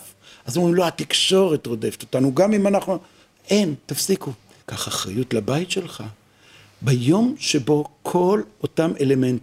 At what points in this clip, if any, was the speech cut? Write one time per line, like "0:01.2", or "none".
0:04.6